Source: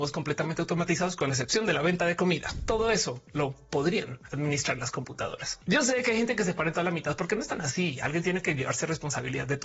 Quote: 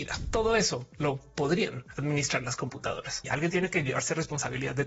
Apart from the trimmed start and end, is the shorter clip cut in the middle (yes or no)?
yes